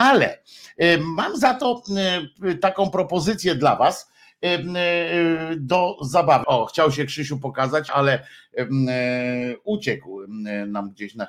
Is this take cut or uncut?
cut